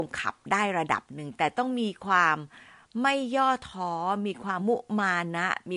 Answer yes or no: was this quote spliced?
yes